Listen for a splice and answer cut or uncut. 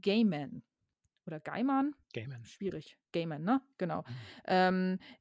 cut